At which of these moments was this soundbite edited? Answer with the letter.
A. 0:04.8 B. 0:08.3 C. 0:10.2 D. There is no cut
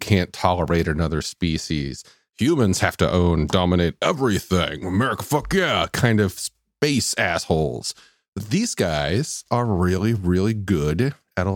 C